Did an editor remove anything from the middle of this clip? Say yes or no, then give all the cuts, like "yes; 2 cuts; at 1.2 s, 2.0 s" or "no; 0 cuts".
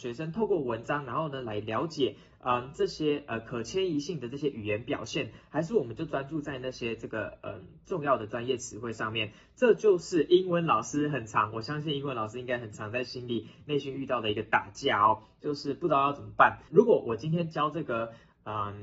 yes; 1 cut; at 16.7 s